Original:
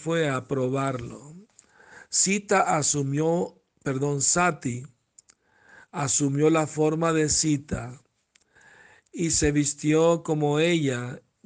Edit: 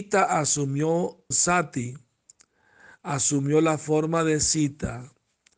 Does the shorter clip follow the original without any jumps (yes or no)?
no